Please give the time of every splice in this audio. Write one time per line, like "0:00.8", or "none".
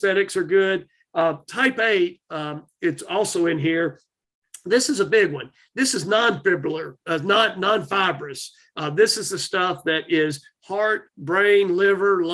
none